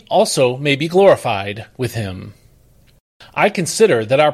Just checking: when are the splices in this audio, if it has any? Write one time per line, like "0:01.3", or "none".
none